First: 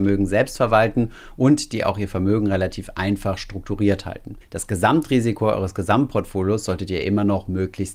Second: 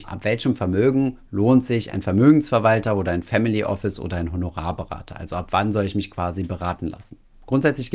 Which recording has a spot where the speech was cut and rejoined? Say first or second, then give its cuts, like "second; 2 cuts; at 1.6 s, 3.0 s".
first; 1 cut; at 4.4 s